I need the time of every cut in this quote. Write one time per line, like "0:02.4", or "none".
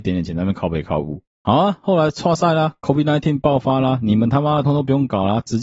0:04.6